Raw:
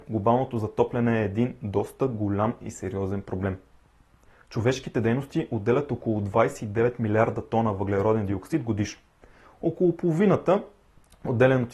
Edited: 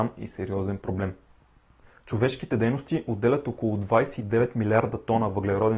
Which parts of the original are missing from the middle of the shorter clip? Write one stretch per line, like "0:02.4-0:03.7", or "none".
none